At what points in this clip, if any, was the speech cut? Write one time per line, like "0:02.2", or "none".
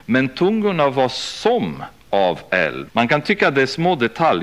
0:02.9